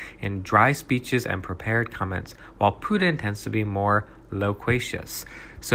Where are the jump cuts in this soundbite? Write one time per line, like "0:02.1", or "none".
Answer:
none